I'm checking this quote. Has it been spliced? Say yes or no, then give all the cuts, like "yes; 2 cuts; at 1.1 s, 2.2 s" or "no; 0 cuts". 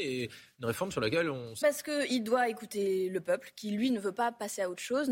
yes; 1 cut; at 1.6 s